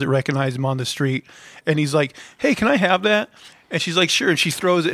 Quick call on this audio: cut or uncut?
cut